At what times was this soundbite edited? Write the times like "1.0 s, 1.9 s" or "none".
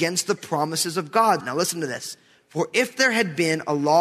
1.4 s